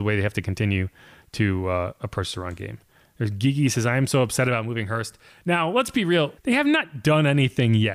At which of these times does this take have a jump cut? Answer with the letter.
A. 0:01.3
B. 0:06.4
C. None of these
B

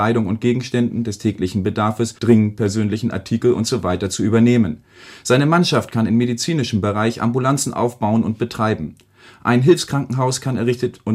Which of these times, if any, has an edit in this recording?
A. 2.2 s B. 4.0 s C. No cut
A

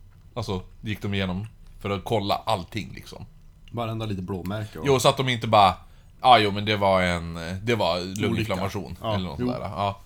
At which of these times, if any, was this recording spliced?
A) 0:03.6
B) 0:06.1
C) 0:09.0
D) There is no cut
D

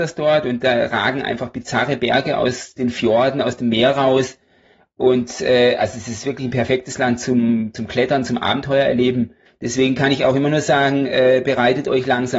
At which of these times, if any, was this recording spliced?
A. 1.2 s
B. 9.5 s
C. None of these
B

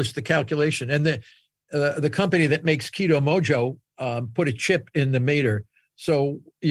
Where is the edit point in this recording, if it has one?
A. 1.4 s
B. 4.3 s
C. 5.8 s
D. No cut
D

